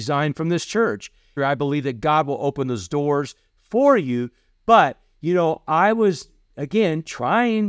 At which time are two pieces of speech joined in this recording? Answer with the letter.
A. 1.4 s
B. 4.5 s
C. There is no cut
A